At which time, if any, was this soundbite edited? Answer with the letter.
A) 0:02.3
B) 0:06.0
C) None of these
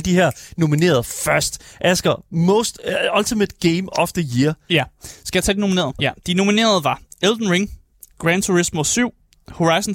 B